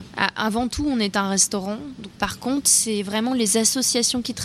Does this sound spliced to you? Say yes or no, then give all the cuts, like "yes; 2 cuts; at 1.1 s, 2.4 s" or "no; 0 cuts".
no; 0 cuts